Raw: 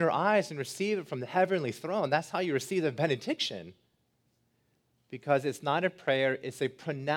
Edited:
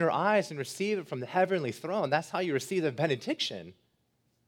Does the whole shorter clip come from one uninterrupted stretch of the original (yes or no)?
yes